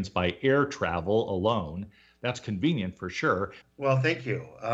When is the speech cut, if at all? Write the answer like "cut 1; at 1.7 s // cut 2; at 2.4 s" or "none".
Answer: cut 1; at 3.6 s